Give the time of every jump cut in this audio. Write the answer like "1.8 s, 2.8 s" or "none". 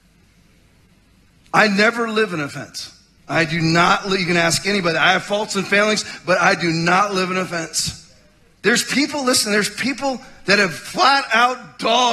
3.2 s, 8.5 s